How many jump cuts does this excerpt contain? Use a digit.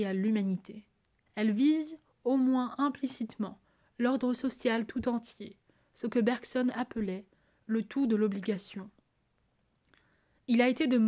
1